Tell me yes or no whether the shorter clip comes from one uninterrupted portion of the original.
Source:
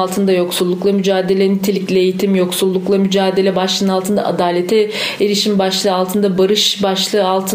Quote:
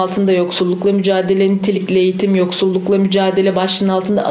yes